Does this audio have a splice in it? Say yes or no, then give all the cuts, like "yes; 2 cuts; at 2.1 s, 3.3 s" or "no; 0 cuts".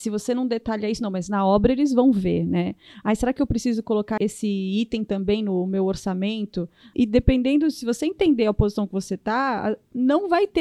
yes; 2 cuts; at 4.2 s, 6.9 s